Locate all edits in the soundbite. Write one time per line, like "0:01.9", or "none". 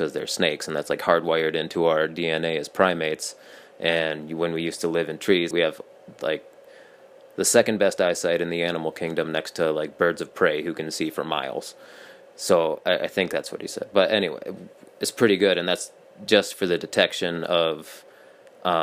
0:05.5